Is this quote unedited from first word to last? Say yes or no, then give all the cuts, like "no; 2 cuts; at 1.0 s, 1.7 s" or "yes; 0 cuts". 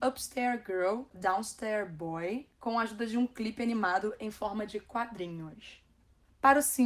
yes; 0 cuts